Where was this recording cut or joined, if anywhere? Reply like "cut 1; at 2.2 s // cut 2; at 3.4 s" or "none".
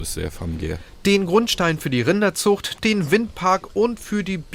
cut 1; at 2.8 s